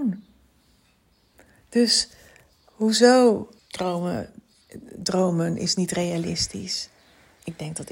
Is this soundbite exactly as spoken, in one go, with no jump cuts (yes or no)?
no